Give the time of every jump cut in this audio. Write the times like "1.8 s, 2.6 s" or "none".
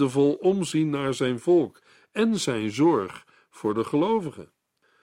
none